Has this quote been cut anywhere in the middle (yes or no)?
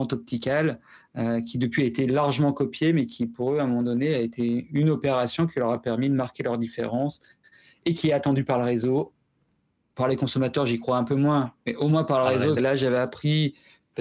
yes